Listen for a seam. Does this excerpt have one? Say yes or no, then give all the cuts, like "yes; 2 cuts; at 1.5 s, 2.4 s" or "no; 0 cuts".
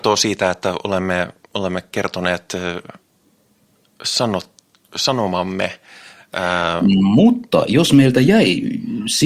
no; 0 cuts